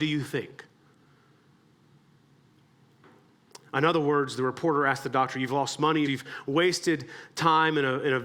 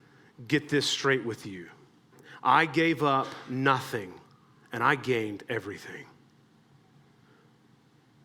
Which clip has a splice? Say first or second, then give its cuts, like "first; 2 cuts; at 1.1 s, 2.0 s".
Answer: first; 2 cuts; at 3.6 s, 6.0 s